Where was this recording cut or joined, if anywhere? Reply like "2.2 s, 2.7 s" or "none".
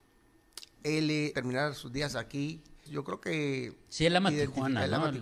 1.3 s, 2.9 s